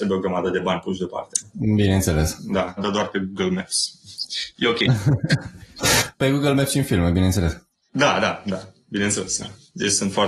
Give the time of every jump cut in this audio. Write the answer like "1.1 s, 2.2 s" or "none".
2.8 s